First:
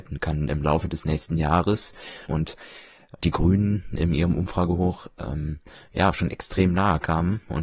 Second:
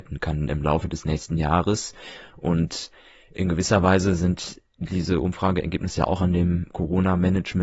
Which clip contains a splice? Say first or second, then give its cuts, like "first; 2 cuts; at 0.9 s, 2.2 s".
first; 1 cut; at 2.3 s